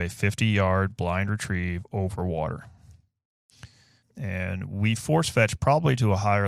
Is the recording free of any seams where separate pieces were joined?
no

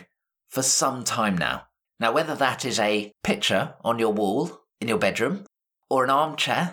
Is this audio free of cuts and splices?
no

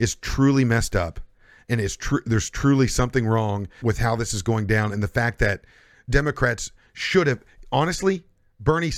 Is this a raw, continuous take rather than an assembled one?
no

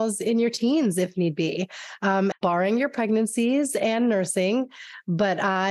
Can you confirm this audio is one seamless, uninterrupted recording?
no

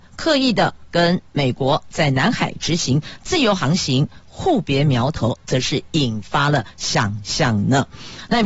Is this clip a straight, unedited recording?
yes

